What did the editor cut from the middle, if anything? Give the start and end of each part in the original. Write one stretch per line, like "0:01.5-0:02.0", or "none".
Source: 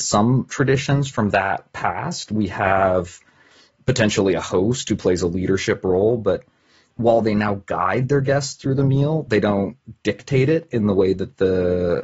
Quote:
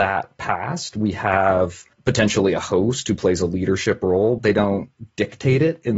0:03.3-0:03.7
0:06.2-0:09.3